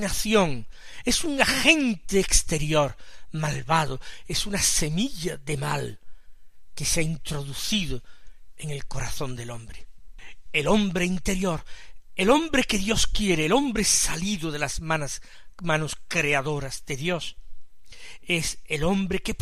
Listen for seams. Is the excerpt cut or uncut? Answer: cut